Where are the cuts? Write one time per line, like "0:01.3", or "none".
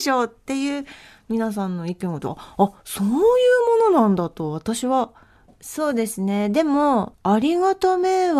0:05.5
0:07.1